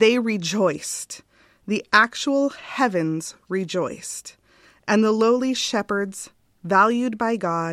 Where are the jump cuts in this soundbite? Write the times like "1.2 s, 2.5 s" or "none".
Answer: none

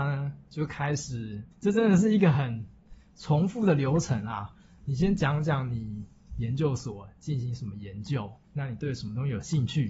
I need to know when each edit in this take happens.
1.5 s, 8.4 s

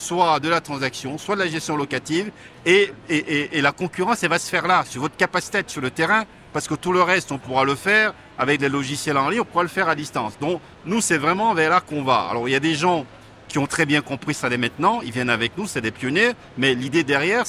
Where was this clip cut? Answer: none

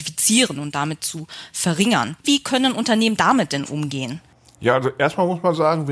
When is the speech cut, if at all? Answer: 2.2 s

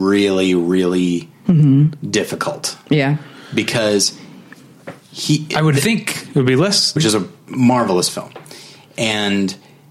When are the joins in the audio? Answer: 7.0 s

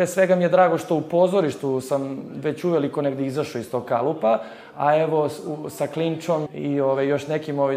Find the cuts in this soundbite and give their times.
6.5 s

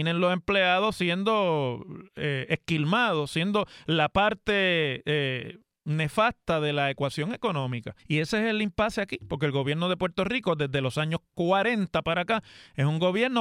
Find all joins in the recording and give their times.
8.0 s

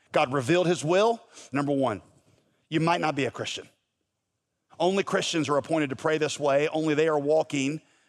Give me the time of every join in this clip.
1.5 s, 4.7 s

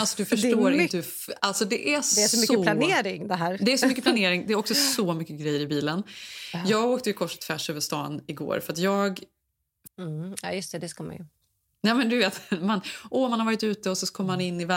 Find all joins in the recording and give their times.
9.9 s

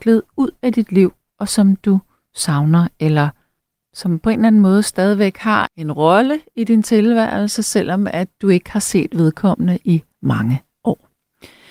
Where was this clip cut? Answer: 5.7 s, 10.2 s

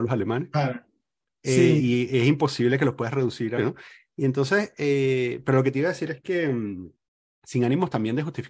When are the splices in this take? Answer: 3.6 s

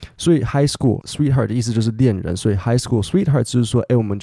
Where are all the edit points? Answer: 1.0 s

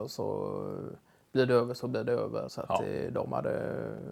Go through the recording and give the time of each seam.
2.5 s

